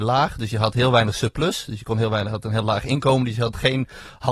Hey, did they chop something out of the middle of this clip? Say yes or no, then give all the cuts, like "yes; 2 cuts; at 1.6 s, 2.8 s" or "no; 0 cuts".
no; 0 cuts